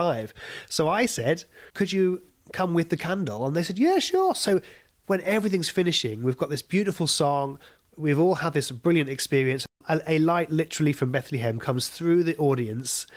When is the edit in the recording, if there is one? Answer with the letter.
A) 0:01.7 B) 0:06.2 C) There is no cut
A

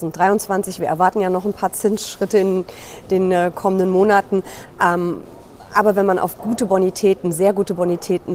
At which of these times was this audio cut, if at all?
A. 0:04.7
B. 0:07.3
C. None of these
C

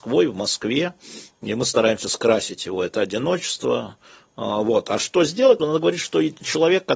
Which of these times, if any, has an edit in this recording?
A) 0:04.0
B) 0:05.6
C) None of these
B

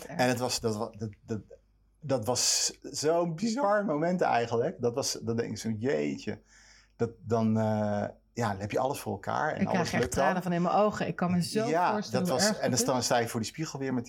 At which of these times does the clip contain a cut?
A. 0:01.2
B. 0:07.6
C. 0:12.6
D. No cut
D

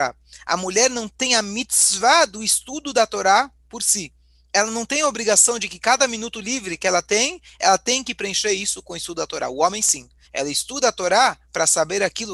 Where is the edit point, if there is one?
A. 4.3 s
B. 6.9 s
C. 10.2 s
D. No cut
C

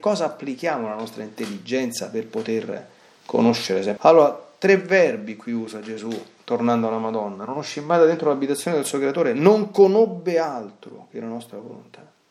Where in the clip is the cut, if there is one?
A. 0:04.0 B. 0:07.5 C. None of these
A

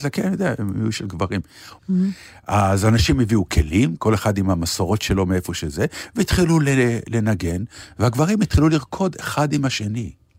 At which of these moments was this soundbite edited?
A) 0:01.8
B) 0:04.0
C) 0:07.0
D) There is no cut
A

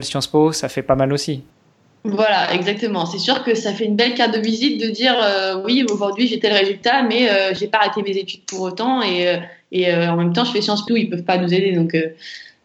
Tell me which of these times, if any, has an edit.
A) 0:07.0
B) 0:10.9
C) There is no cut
B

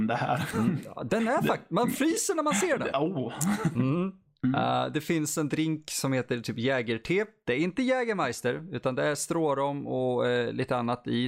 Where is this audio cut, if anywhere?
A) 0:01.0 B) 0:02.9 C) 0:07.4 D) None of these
B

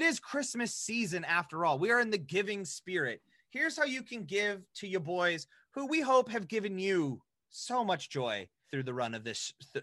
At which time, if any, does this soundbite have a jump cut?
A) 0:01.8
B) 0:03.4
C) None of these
C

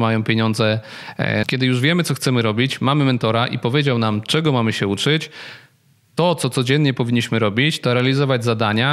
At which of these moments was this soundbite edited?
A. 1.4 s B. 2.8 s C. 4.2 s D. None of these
A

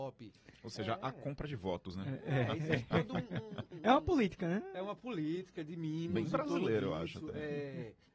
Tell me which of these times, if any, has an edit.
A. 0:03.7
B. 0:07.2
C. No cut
A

